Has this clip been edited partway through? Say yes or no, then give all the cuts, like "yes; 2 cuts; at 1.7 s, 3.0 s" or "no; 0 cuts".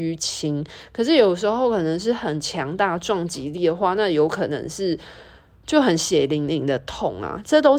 no; 0 cuts